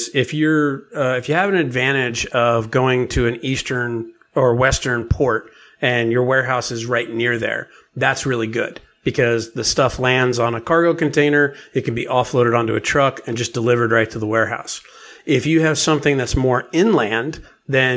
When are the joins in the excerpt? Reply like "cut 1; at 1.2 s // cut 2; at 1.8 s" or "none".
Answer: none